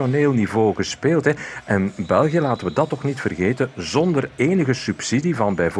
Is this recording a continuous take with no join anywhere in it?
yes; 0 cuts

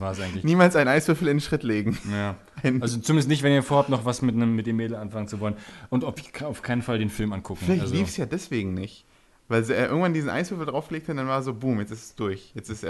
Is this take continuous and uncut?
yes; 0 cuts

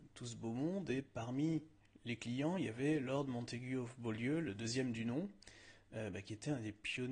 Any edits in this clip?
no; 0 cuts

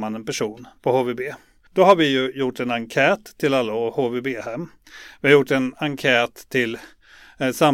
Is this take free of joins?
no; 1 cut; at 1.7 s

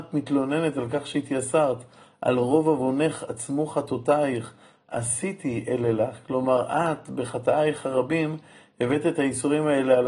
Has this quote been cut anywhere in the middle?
no; 0 cuts

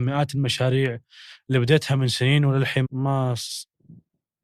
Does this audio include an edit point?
yes; 1 cut; at 2.8 s

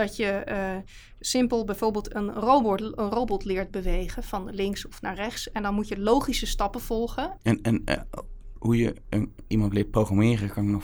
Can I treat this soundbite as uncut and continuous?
no; 1 cut; at 7.4 s

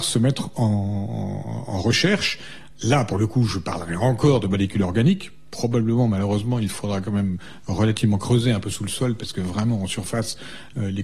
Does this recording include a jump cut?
no; 0 cuts

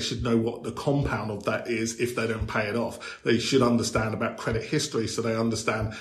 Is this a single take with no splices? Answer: yes; 0 cuts

